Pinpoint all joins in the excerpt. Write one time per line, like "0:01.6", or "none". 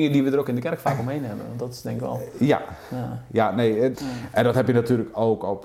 0:03.9